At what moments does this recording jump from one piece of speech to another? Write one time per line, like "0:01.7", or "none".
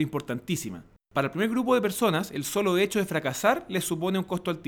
none

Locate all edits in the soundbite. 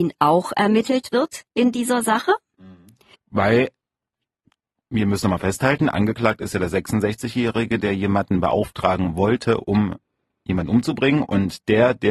0:03.1

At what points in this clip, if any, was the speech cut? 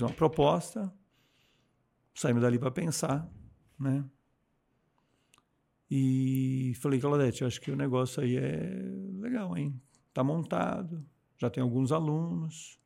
none

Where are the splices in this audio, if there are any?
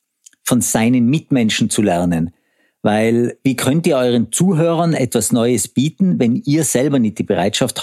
none

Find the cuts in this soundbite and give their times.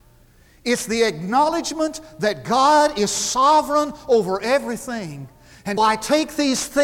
0:05.8

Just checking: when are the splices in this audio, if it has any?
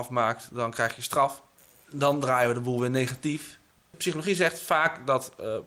none

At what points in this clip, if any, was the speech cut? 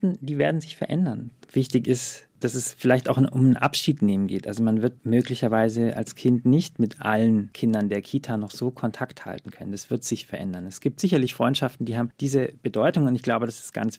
0:01.4

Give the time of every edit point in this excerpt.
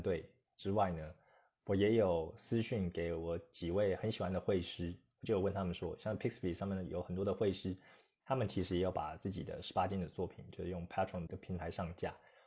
0:11.3

